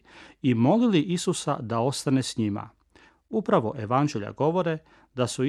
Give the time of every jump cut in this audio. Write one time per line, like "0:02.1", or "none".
0:03.1

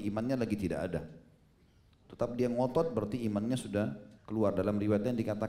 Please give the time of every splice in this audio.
0:02.0
0:04.2

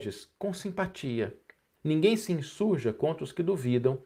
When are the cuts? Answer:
0:01.8

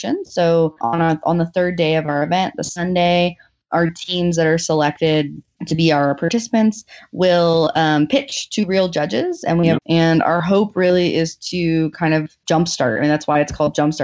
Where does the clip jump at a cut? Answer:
0:09.8

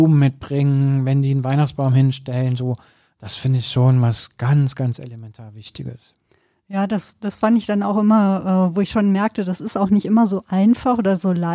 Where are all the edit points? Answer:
none

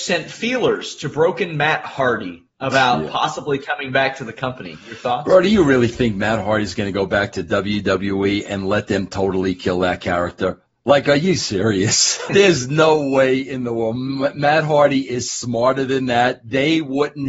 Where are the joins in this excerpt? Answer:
0:02.5
0:12.3

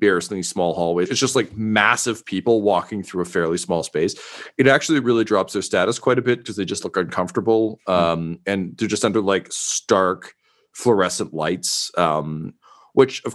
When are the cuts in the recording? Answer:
0:01.1

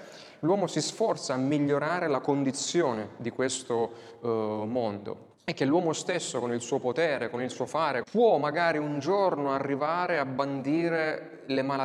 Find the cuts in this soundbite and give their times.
0:05.3
0:08.0

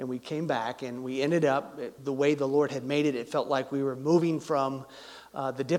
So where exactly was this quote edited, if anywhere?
0:02.0

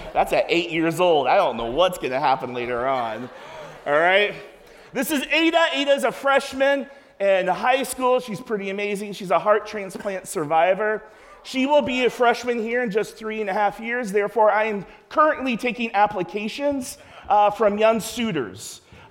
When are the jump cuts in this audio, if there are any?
none

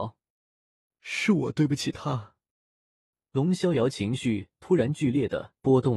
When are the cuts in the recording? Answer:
none

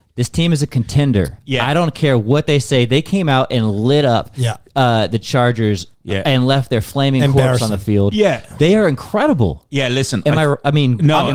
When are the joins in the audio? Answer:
none

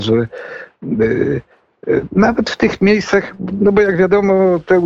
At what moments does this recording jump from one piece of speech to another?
none

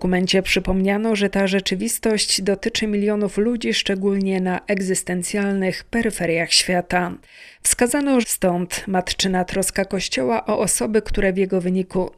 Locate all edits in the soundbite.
0:08.2

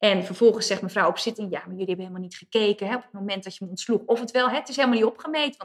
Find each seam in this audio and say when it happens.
none

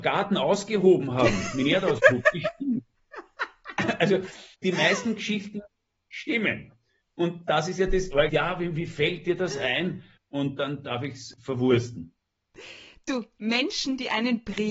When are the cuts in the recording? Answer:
0:04.5
0:08.3
0:10.2

